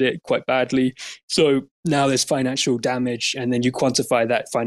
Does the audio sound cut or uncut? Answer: uncut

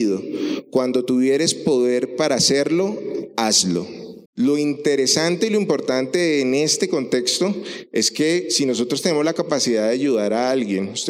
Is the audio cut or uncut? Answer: cut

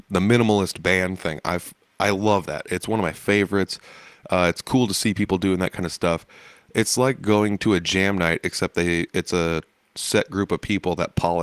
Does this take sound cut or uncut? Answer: uncut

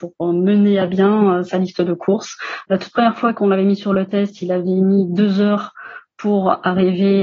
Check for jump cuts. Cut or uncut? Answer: uncut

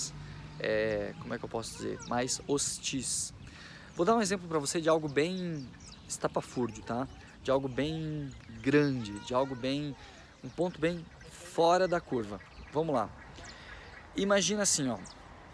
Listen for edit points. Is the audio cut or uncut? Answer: uncut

